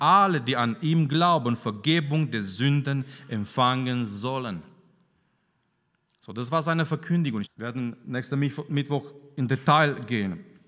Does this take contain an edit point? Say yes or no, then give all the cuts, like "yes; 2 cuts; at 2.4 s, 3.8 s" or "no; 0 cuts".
yes; 1 cut; at 7.4 s